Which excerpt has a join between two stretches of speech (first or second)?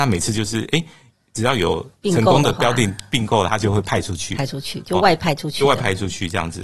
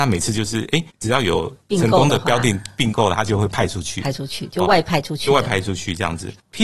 second